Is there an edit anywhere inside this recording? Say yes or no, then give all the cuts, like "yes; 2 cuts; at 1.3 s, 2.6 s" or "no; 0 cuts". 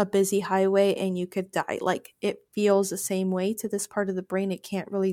no; 0 cuts